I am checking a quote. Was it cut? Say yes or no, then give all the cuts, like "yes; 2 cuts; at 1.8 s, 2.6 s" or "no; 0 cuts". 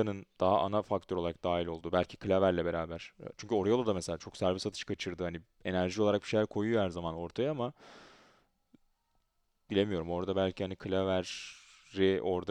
no; 0 cuts